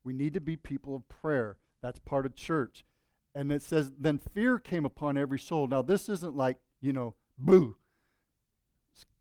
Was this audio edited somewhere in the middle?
no; 0 cuts

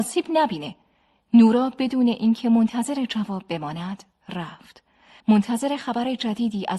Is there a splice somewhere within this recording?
yes; 1 cut; at 5.2 s

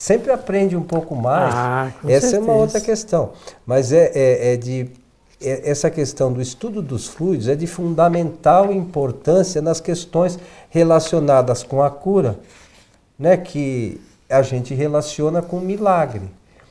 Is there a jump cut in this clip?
no; 0 cuts

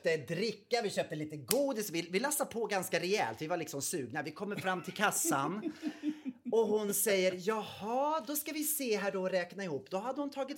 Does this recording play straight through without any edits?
yes; 0 cuts

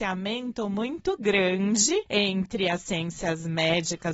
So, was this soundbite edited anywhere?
no; 0 cuts

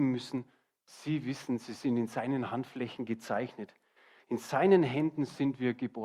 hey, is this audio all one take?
no; 1 cut; at 4.2 s

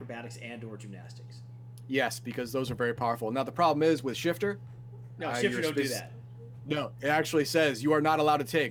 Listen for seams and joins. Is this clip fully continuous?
yes; 0 cuts

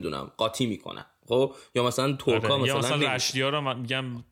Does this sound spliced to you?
no; 0 cuts

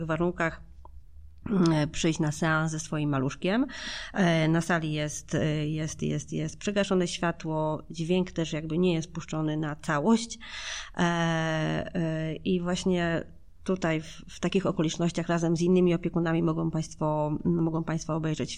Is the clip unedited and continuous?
yes; 0 cuts

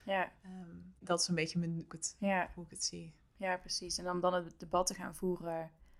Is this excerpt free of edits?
no; 1 cut; at 1.9 s

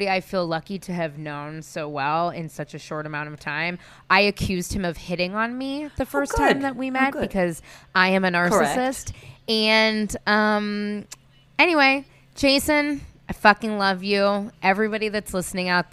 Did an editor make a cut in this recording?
no; 0 cuts

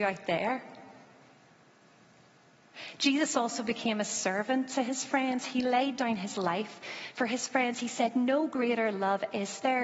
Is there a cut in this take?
no; 0 cuts

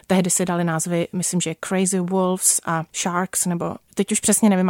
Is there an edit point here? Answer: yes; 1 cut; at 2.9 s

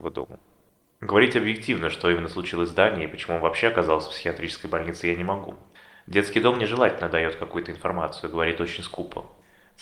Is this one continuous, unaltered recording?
yes; 0 cuts

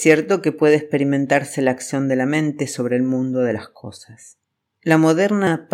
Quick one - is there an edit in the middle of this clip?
no; 0 cuts

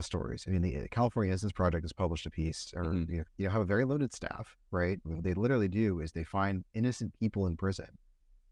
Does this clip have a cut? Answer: yes; 2 cuts; at 3.2 s, 5.0 s

